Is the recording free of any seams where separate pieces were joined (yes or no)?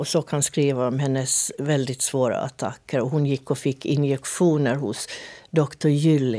yes